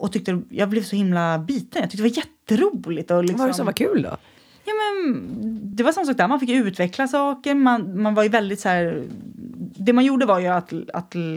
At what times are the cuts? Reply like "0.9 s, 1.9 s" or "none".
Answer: none